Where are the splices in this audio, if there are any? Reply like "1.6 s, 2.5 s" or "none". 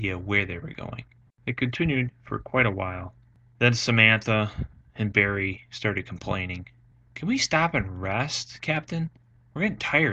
1.3 s